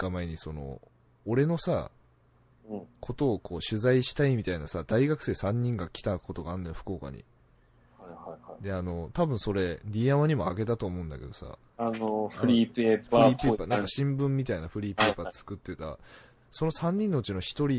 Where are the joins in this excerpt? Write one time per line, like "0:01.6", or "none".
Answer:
none